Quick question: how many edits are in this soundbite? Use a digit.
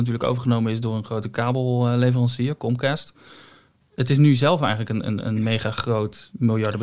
1